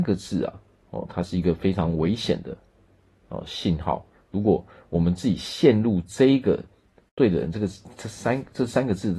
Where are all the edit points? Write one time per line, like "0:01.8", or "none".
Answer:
none